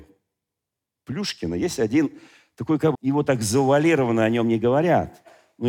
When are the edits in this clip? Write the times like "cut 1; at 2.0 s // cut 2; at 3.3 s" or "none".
cut 1; at 2.9 s